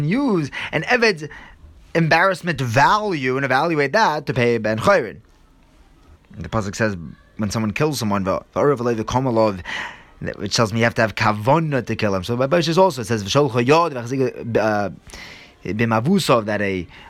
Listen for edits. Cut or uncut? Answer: cut